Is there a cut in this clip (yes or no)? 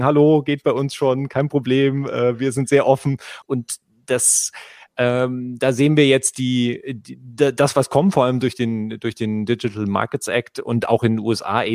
yes